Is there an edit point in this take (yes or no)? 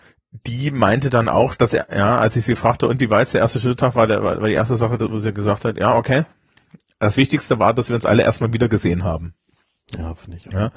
no